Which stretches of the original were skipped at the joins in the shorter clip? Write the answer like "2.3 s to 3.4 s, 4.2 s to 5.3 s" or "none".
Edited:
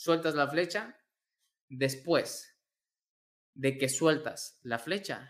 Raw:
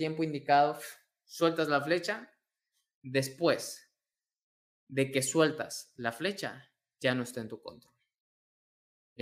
none